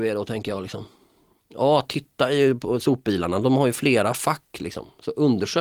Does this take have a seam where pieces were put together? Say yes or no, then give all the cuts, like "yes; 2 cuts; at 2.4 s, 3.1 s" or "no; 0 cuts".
no; 0 cuts